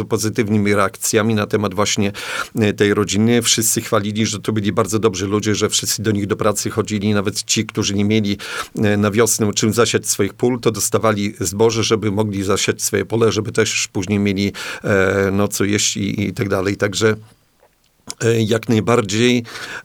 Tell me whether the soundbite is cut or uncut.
uncut